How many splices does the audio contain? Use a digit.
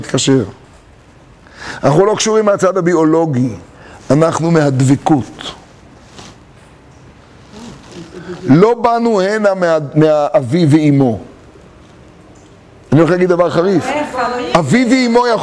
0